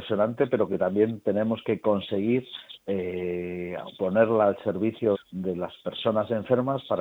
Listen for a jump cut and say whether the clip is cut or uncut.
cut